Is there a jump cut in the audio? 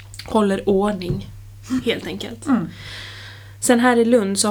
no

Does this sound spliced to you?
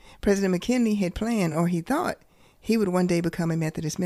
no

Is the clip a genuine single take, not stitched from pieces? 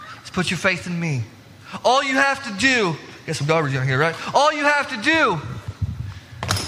yes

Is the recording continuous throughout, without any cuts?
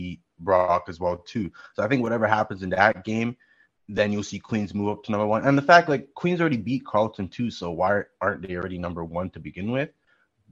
yes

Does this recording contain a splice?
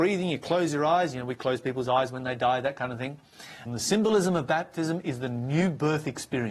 yes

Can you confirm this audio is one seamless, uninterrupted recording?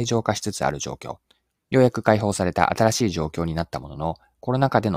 no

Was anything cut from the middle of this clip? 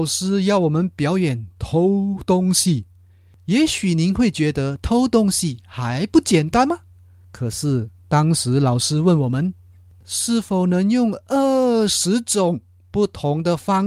no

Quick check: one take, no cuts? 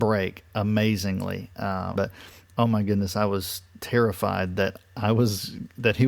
no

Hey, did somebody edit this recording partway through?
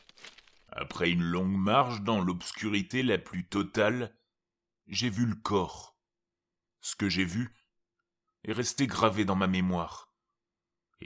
yes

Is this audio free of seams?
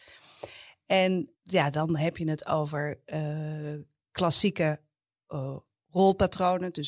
no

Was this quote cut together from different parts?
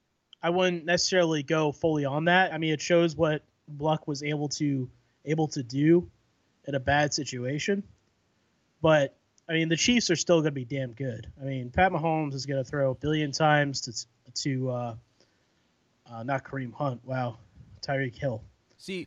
no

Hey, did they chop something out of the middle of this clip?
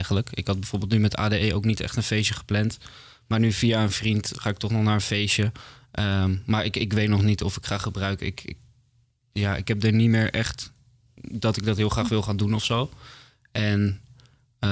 no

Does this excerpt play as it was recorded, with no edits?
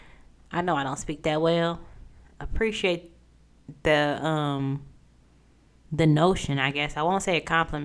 yes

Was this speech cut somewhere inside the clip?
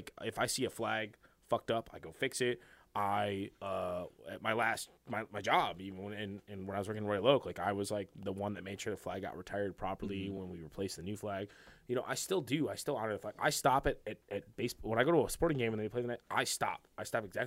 no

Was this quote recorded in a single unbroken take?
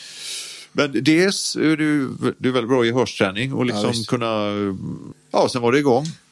no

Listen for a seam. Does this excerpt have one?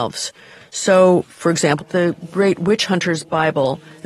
yes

